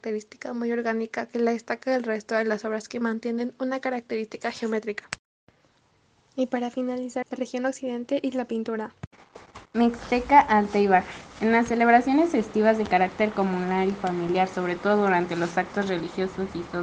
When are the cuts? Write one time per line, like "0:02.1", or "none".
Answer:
0:07.2

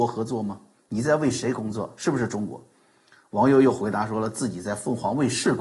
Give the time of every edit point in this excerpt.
none

